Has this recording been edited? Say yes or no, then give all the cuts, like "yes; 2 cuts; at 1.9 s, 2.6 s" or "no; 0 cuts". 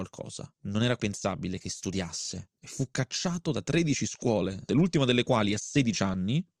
yes; 2 cuts; at 1.0 s, 4.7 s